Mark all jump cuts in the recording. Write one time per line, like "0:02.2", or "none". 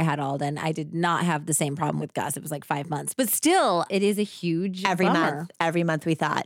none